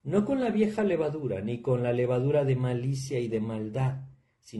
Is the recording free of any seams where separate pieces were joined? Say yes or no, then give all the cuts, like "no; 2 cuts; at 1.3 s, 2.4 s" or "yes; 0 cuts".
yes; 0 cuts